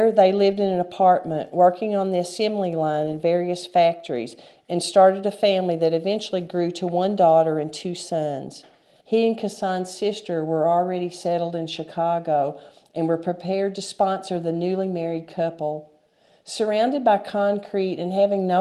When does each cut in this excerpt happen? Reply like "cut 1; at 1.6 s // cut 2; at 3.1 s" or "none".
cut 1; at 9.0 s